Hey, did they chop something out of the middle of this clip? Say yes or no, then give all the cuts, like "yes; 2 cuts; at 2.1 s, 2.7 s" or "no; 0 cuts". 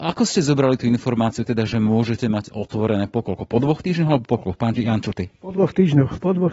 no; 0 cuts